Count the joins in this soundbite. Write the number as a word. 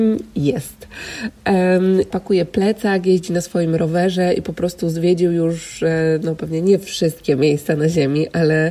one